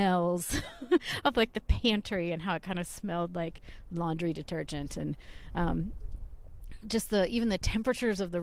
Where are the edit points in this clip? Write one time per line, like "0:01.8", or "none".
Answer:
none

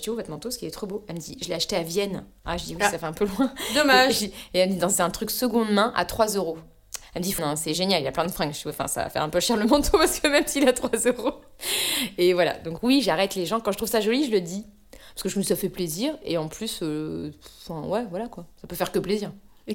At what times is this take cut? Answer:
0:07.4

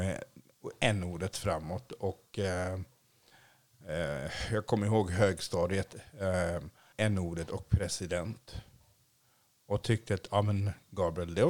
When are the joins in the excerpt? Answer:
0:06.9

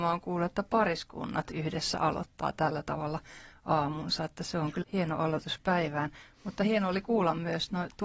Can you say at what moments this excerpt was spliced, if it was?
0:04.8

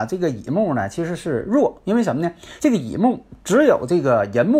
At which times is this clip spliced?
none

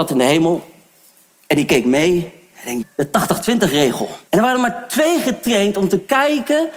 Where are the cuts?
0:02.8
0:04.3

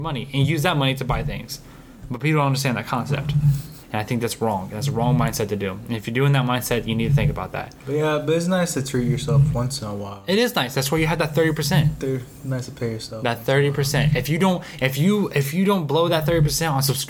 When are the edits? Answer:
0:03.8

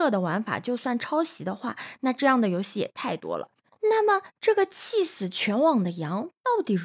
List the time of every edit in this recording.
none

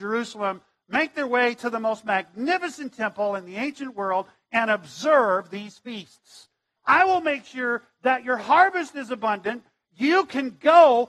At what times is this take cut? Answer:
0:06.8

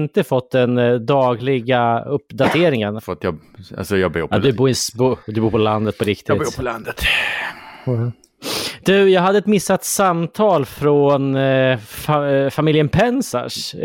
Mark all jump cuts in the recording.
0:03.0

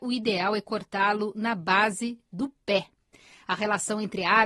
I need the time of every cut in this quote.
none

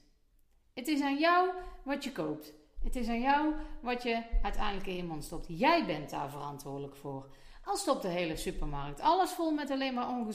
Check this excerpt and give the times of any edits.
none

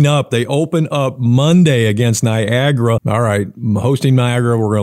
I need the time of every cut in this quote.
0:03.0

